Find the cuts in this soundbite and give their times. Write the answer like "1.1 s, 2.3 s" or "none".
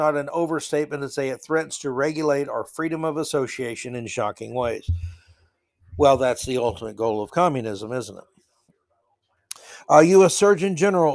none